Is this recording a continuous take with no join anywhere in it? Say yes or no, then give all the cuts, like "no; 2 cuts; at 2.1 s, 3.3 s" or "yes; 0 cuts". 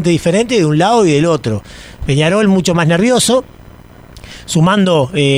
yes; 0 cuts